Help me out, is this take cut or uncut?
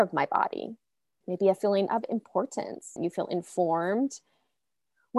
cut